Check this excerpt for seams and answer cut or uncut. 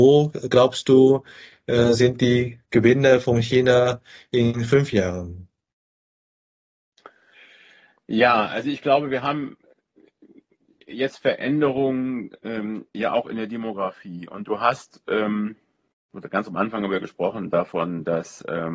uncut